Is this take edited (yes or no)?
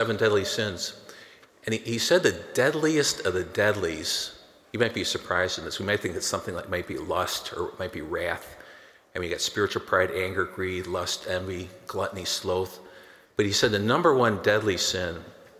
no